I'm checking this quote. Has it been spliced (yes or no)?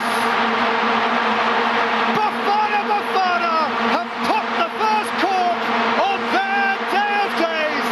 no